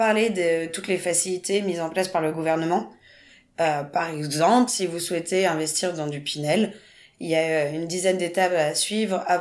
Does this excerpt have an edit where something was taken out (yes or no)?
no